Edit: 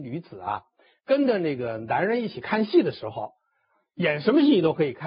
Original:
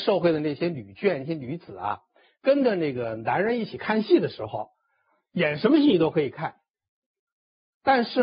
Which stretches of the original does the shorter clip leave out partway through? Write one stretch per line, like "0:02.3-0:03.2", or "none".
none

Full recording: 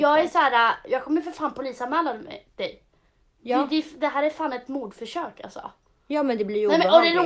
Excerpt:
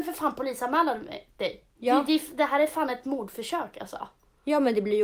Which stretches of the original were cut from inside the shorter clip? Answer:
0:02.9-0:03.3

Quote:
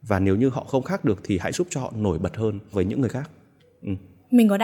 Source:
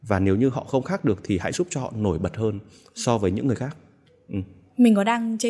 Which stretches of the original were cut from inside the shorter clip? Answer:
0:02.7-0:03.2

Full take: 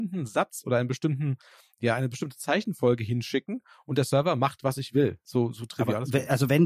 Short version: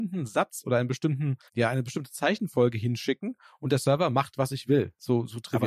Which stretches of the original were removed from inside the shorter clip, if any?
0:01.5-0:01.7

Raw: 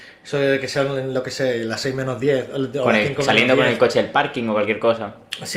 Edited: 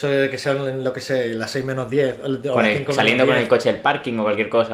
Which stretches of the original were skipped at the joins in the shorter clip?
none

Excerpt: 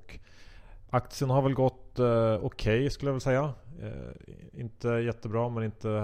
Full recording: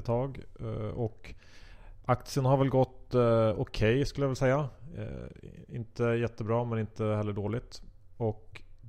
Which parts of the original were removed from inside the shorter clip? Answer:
none

